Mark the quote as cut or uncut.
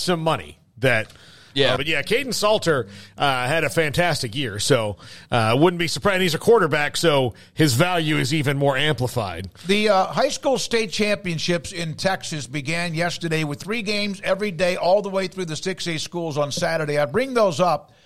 cut